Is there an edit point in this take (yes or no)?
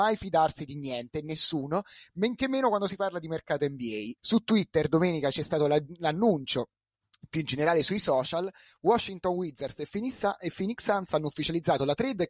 yes